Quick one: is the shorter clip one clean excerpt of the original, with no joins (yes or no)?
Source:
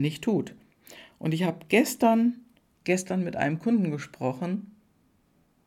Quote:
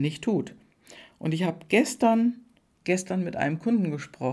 yes